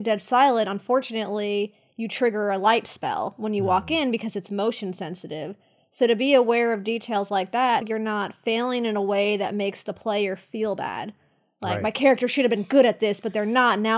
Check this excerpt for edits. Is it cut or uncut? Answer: cut